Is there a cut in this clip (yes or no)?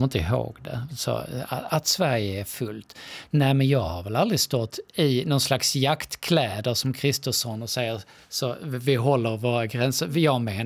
no